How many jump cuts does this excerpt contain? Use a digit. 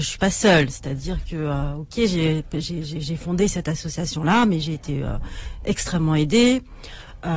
0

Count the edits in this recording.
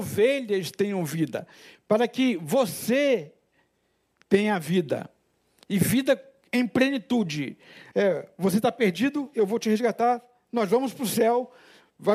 1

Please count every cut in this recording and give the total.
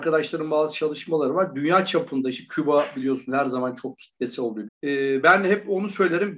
1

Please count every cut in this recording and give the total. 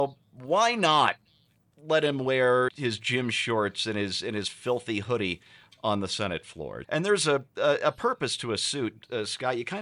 2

